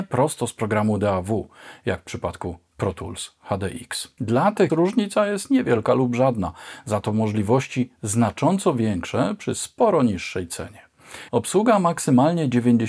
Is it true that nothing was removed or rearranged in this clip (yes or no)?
no